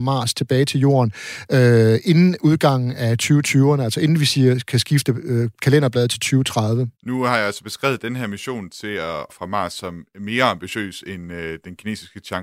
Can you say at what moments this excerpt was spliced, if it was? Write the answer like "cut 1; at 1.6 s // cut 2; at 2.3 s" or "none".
cut 1; at 6.9 s // cut 2; at 9.3 s